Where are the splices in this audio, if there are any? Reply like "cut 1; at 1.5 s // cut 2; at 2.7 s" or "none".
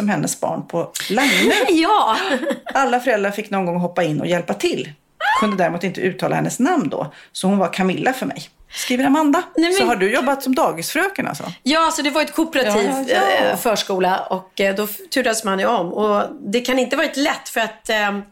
none

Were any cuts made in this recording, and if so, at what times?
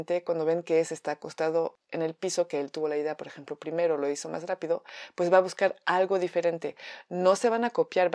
none

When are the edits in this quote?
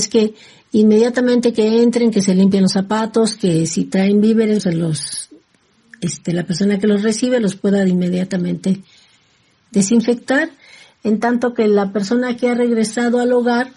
cut 1; at 4.6 s

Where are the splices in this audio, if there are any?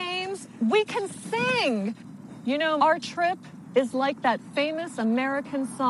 cut 1; at 2.8 s

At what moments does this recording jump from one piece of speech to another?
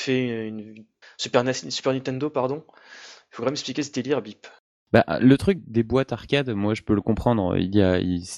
cut 1; at 1.0 s // cut 2; at 5.6 s

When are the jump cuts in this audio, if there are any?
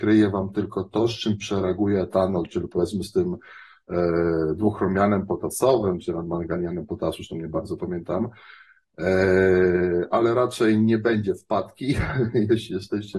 none

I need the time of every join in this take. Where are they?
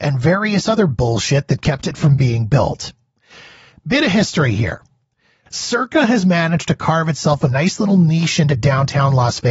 cut 1; at 5.5 s

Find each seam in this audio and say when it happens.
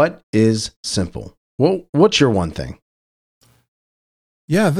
none

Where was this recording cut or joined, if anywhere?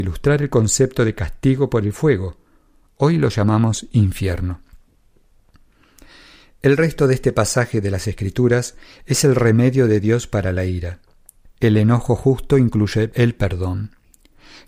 cut 1; at 11.5 s

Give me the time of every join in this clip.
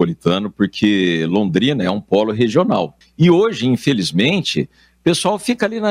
cut 1; at 3.0 s

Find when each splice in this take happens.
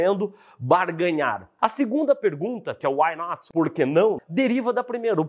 cut 1; at 1.6 s // cut 2; at 4.2 s

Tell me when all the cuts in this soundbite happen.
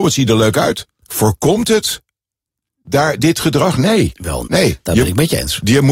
cut 1; at 1.0 s // cut 2; at 4.4 s

